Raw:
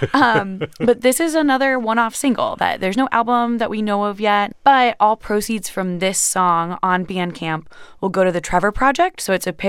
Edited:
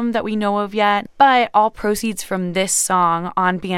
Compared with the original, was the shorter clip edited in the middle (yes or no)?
no